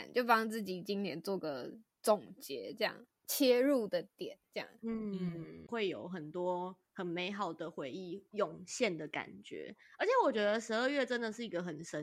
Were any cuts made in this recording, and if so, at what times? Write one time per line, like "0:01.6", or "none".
0:03.1
0:05.7